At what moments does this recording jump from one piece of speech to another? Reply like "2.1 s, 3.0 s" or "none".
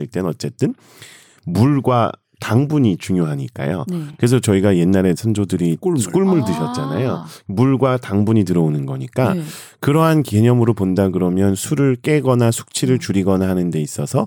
none